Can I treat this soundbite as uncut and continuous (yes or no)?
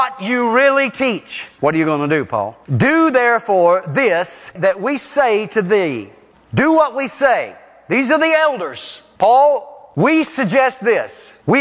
yes